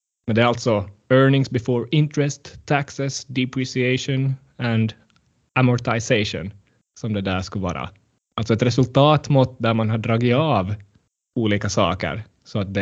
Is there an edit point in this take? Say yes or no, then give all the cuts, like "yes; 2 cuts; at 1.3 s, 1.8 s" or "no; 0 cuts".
no; 0 cuts